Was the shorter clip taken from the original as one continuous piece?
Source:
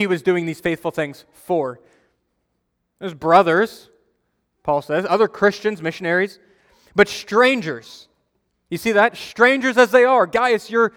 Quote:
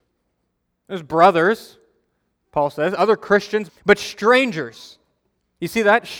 no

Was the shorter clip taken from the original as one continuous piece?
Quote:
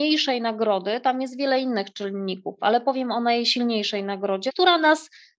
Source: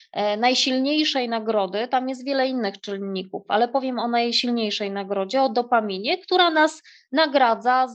no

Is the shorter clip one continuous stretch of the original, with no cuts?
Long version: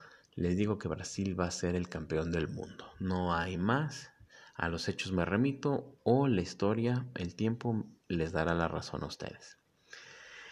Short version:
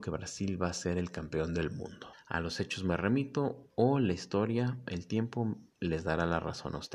no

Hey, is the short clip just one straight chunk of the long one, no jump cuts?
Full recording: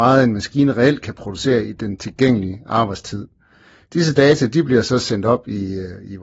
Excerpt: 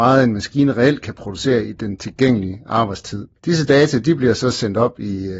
no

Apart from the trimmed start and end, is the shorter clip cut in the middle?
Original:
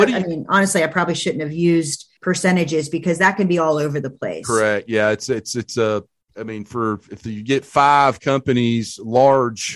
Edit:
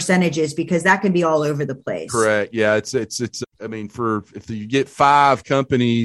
yes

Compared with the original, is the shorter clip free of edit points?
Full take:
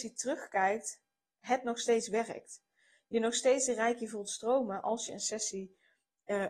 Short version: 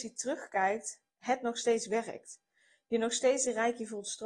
no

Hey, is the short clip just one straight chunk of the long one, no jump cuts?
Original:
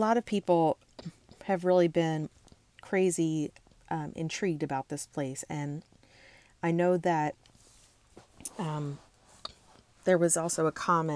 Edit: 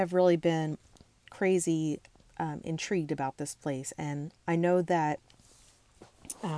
no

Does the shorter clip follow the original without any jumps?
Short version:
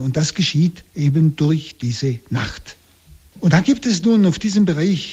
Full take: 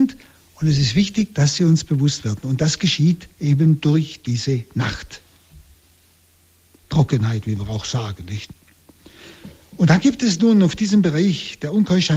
no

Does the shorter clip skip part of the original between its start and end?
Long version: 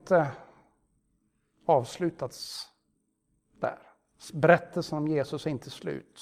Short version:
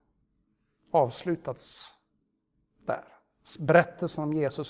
no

